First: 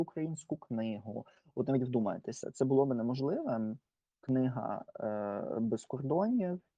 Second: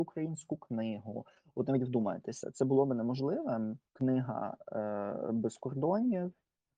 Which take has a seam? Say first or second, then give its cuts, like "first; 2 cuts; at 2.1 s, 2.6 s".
second; 1 cut; at 3.9 s